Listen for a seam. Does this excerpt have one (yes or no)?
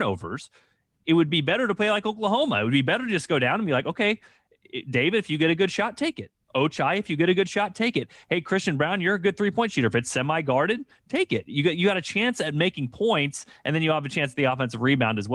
no